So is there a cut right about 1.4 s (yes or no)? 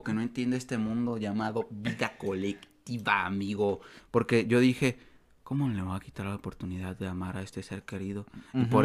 no